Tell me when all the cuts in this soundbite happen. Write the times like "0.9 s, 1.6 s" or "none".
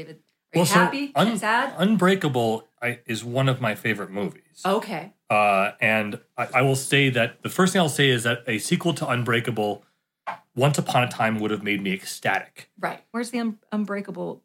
6.5 s, 13.1 s

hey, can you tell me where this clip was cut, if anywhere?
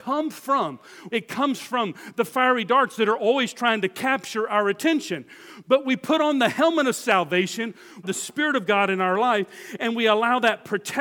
1.1 s, 8.0 s

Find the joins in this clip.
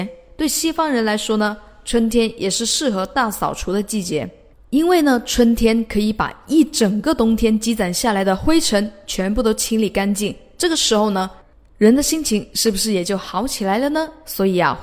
none

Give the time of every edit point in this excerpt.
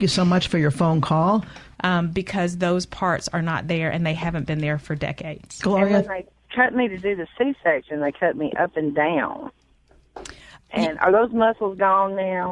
1.7 s

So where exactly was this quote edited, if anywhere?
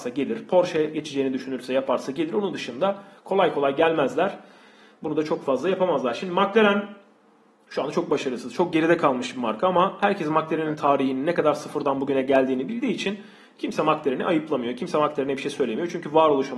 none

